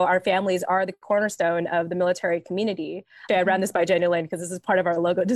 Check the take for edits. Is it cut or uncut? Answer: cut